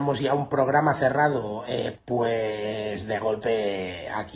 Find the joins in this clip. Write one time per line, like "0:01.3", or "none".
0:01.9